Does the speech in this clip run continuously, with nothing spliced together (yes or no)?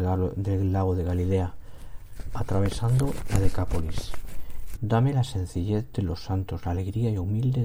no